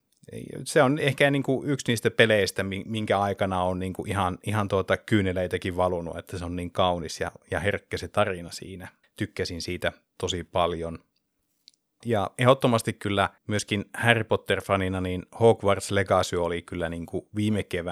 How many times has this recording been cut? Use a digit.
3